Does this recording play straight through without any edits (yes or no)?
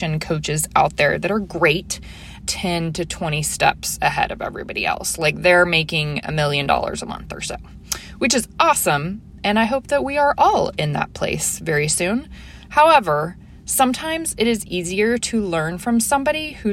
no